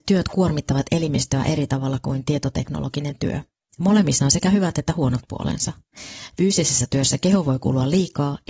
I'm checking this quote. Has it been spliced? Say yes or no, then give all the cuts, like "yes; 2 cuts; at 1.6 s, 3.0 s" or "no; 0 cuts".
no; 0 cuts